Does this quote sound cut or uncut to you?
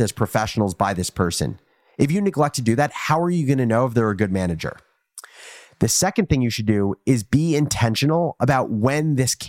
uncut